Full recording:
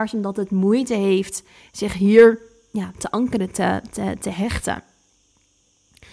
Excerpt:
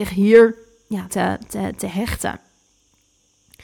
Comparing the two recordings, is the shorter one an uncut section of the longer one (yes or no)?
no